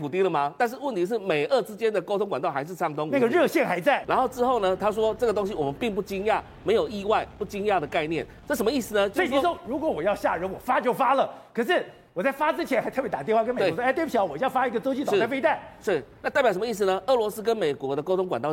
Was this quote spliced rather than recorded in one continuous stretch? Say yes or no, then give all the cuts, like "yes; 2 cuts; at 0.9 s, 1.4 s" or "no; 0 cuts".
yes; 1 cut; at 4.0 s